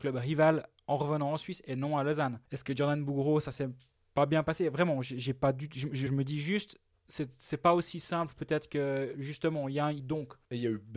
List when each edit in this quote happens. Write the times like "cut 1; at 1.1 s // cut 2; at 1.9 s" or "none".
cut 1; at 6.1 s // cut 2; at 10.0 s